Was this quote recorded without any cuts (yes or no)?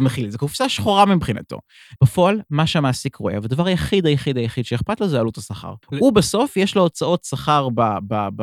no